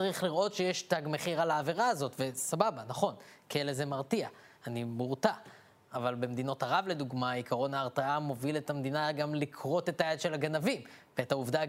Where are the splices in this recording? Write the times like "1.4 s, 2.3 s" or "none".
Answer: none